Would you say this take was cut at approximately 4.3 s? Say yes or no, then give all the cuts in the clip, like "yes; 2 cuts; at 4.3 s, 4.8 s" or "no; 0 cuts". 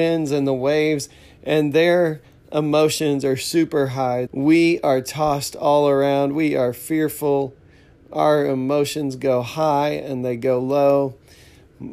yes; 1 cut; at 4.3 s